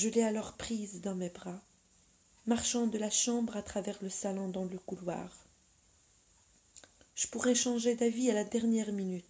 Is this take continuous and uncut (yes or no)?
no